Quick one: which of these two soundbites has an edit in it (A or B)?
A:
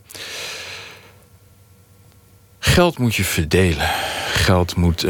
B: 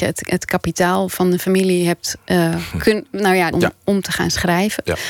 B